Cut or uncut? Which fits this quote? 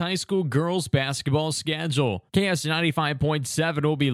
cut